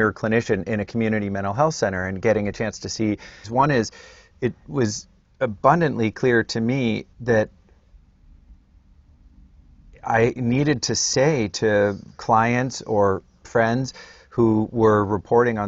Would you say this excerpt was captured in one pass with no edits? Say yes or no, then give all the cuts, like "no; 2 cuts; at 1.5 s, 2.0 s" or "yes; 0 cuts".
no; 2 cuts; at 3.4 s, 7.1 s